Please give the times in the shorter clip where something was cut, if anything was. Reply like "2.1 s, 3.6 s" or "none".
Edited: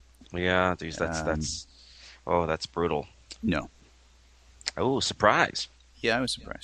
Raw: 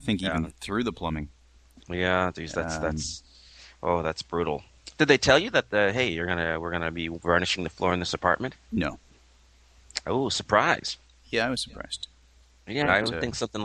3.4 s